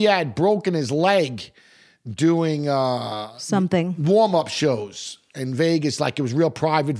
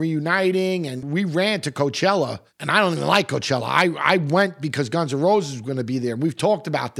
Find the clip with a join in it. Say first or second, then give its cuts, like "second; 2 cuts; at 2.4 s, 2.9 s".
second; 1 cut; at 1.0 s